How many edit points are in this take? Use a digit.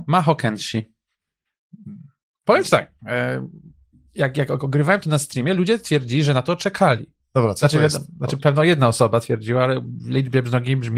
0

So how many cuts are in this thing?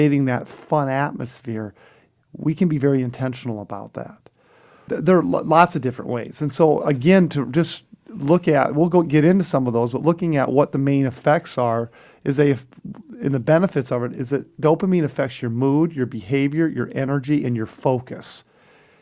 1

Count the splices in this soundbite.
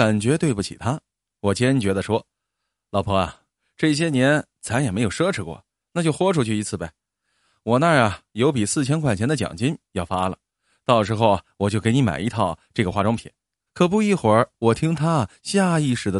1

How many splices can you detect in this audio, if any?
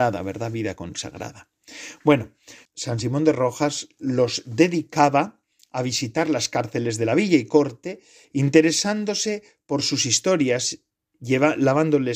2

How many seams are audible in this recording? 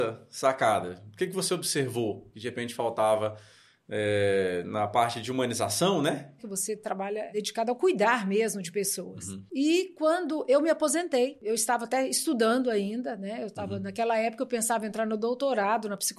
1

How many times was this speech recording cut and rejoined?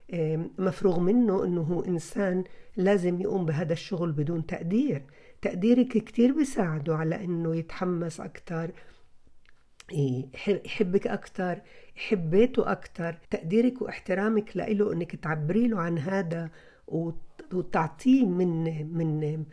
1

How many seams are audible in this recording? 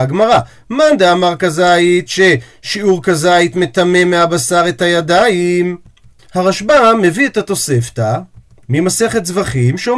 2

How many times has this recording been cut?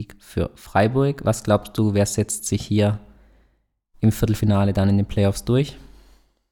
0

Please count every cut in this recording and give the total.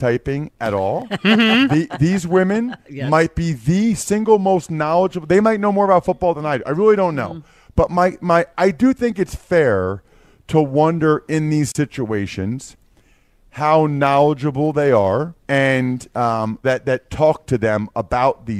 3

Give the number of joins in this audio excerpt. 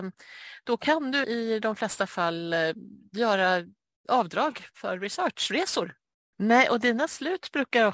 2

